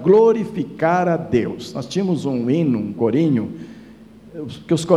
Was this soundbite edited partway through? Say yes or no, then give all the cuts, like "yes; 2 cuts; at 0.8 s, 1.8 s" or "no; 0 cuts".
no; 0 cuts